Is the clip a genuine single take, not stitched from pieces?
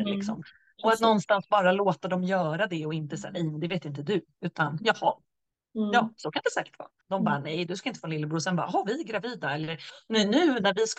no; 1 cut; at 7.0 s

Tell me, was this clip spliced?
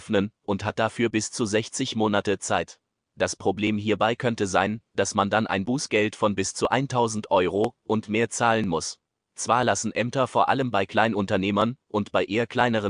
no; 0 cuts

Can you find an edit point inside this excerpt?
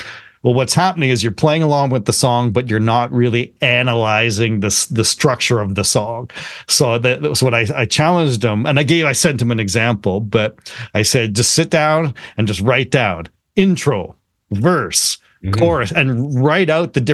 no; 0 cuts

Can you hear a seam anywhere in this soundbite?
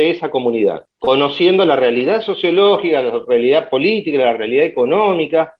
no; 0 cuts

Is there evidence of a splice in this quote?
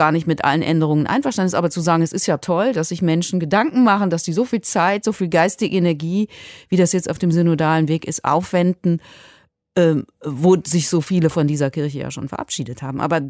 no; 0 cuts

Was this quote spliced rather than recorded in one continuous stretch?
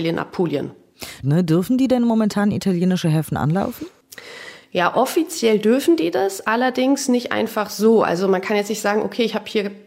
yes; 1 cut; at 1.2 s

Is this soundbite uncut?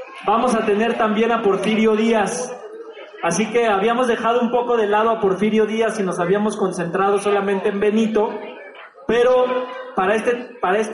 yes; 0 cuts

